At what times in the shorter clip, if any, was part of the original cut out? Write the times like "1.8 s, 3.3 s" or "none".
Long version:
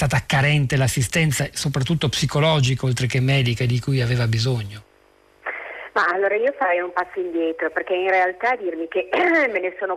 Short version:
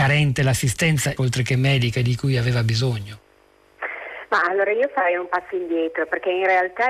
1.2 s